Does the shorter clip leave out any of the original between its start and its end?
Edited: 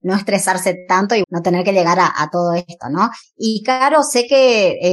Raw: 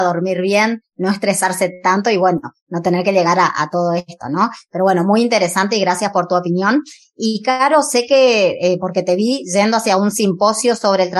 yes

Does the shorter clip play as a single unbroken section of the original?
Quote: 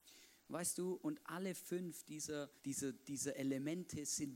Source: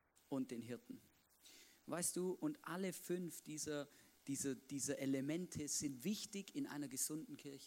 no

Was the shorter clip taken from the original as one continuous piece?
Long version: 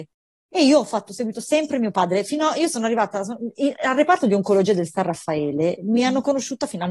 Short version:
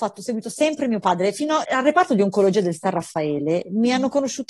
no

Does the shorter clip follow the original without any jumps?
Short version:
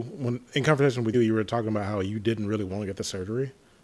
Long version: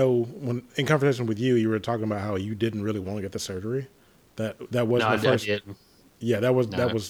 no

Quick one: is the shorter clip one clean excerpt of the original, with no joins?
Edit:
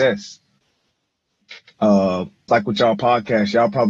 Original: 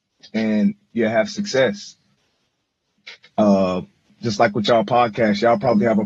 no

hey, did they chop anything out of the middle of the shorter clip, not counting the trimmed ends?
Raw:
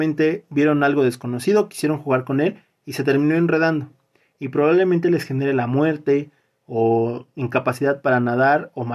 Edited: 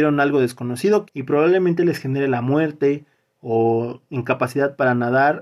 yes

